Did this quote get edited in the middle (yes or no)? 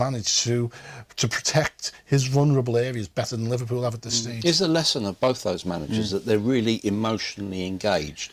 no